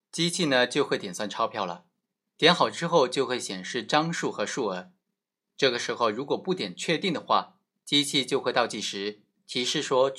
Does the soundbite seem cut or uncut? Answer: uncut